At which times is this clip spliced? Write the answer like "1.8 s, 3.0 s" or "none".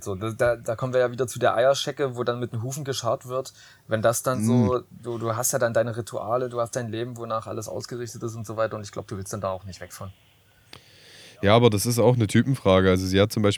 none